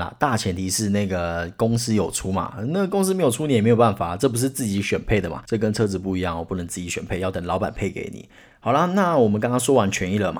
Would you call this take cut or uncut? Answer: uncut